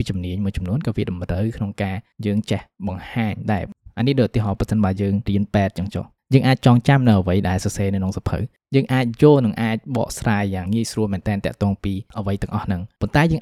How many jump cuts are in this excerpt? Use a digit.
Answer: 1